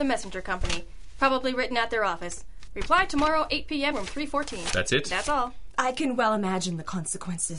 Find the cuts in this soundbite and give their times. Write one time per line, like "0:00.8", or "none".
0:02.7
0:03.9
0:05.7